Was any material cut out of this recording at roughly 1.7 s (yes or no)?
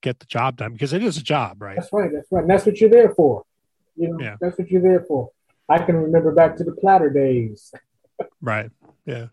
no